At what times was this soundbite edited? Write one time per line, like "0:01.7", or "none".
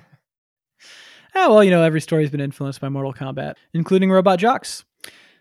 0:03.6